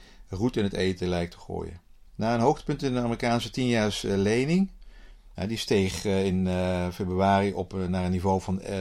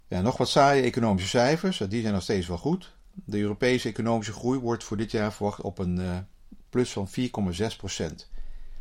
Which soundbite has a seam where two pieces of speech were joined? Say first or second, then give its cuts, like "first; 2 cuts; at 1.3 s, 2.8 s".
first; 2 cuts; at 2.1 s, 5.3 s